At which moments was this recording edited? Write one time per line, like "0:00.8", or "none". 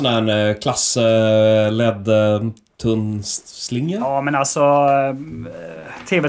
none